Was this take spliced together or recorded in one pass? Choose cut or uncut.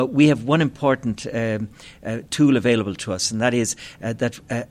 uncut